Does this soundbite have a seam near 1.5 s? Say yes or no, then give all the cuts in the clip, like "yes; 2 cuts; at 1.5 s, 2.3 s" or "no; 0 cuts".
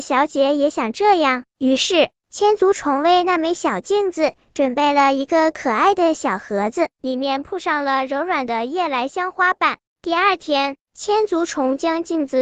no; 1 cut; at 9.8 s